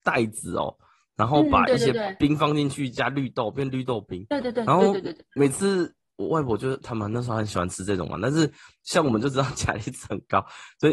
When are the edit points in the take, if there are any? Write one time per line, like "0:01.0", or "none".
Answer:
0:06.1